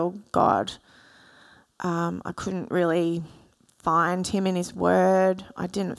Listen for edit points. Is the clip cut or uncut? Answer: uncut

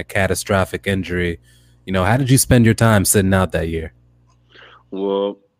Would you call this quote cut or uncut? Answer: uncut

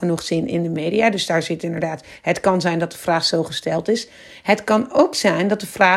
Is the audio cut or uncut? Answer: uncut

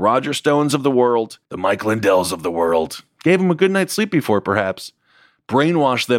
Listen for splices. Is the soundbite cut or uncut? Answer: cut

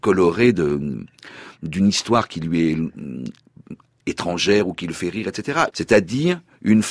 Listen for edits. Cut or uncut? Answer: cut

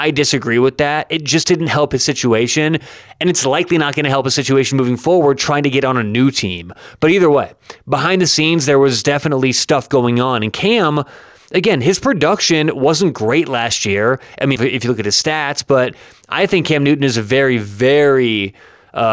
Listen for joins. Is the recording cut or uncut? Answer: cut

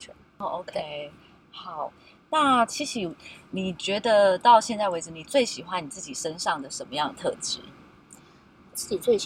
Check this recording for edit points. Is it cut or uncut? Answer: uncut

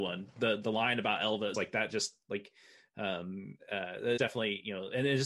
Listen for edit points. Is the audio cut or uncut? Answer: cut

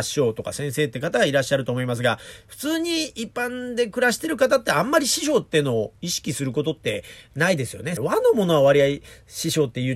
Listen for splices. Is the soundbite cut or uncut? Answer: cut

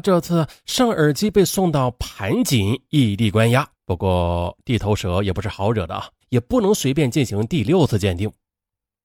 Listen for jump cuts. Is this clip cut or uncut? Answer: cut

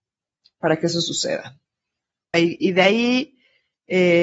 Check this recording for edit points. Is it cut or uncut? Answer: cut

